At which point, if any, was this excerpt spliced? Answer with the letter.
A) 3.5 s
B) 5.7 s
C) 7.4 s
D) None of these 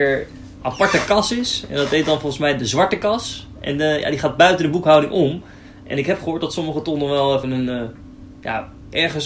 C